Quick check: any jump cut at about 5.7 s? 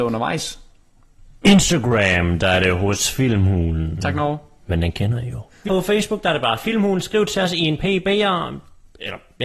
yes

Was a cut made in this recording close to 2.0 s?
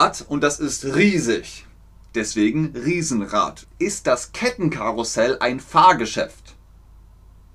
no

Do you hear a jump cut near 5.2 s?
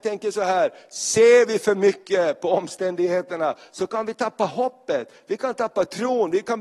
no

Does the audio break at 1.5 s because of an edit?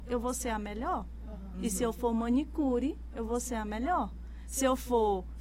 no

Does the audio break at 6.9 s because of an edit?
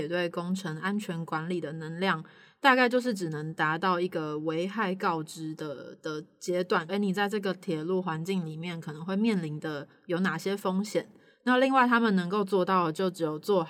yes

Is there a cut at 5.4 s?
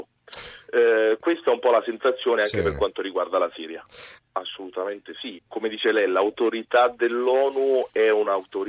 yes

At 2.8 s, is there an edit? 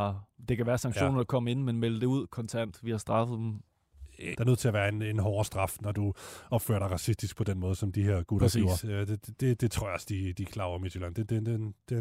no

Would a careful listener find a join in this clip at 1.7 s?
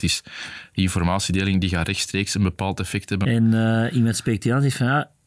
no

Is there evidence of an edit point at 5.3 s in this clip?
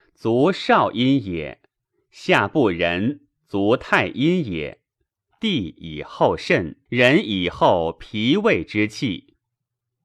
yes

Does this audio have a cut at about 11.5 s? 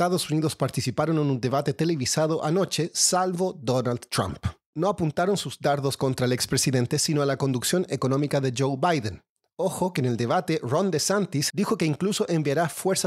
yes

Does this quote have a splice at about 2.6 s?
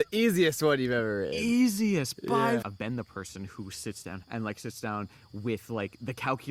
yes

